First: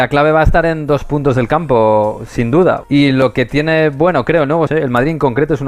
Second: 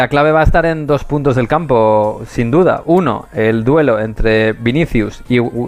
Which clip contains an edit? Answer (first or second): first